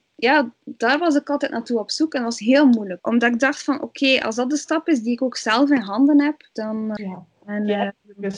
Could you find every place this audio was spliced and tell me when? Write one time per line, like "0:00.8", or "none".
0:03.0
0:07.0